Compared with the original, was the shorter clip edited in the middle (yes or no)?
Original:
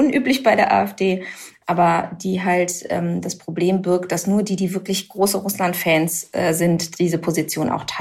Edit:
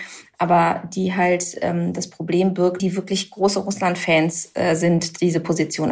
yes